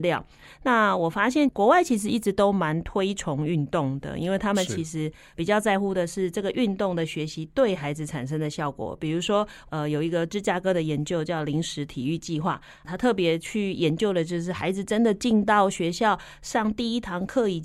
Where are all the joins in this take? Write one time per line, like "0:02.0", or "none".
none